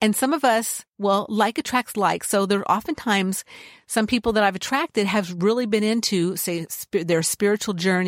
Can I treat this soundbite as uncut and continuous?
yes; 0 cuts

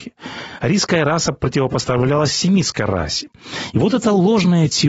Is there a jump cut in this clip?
no; 0 cuts

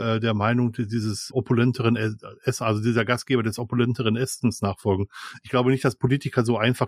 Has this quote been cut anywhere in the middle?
yes; 1 cut; at 1.3 s

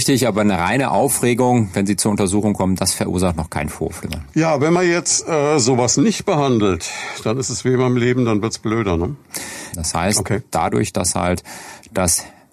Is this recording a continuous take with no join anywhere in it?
no; 1 cut; at 9.7 s

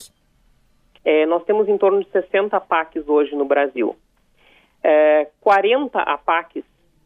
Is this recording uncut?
no; 1 cut; at 1.0 s

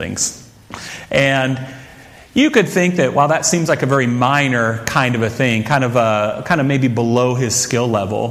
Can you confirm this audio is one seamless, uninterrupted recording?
yes; 0 cuts

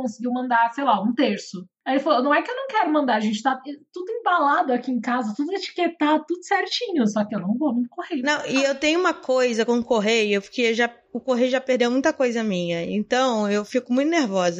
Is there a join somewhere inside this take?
no; 0 cuts

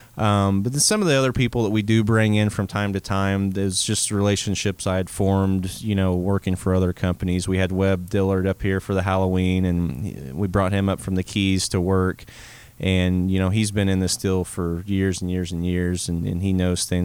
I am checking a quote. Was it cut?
no; 0 cuts

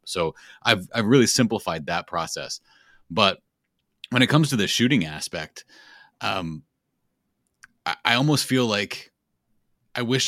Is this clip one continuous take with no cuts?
yes; 0 cuts

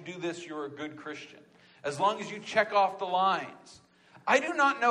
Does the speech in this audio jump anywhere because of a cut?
no; 0 cuts

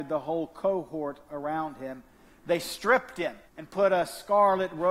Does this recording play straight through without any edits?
no; 1 cut; at 3.5 s

